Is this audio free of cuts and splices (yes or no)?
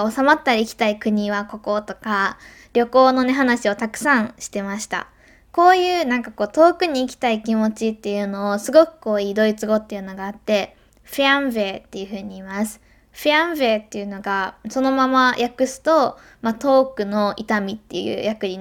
yes